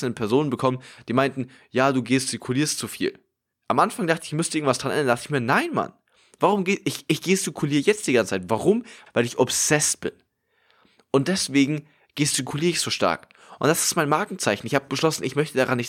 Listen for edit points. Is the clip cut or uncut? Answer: cut